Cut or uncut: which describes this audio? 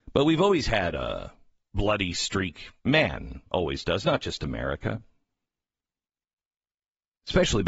uncut